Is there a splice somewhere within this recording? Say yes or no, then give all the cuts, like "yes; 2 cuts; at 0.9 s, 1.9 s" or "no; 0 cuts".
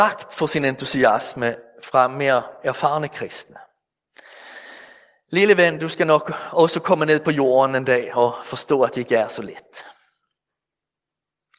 no; 0 cuts